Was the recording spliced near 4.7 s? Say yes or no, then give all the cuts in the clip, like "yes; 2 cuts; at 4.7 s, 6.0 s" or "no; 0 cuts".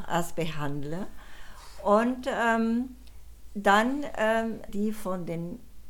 yes; 1 cut; at 4.7 s